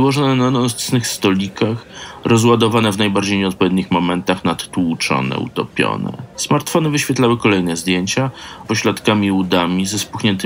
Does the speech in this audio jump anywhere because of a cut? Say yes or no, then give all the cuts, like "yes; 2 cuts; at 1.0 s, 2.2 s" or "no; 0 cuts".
yes; 2 cuts; at 6.3 s, 8.6 s